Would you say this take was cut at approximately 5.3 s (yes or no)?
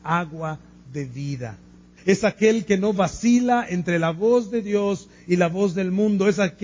no